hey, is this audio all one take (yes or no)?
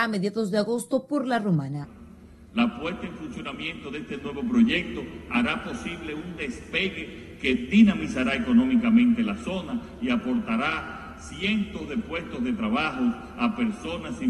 yes